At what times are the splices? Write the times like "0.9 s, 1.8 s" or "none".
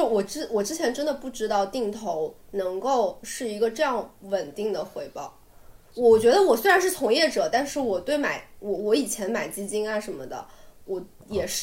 5.8 s